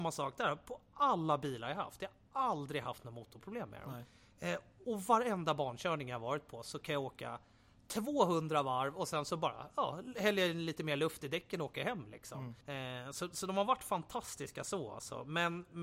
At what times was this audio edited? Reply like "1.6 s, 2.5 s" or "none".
12.6 s